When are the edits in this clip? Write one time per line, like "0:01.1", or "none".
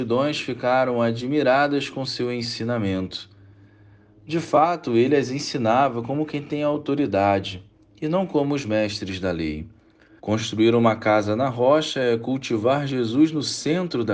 0:10.2